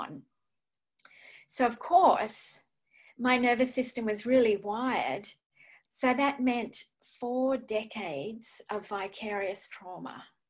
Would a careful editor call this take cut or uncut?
cut